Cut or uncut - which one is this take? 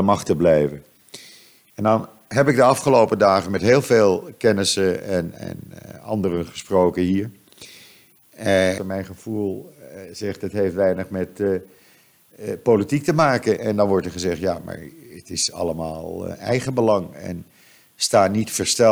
cut